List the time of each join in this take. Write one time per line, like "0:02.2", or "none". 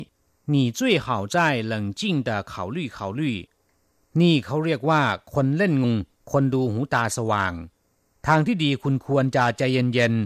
0:05.8